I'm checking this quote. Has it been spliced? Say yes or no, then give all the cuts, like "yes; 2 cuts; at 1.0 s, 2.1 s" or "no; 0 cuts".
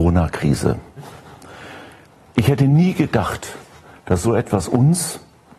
no; 0 cuts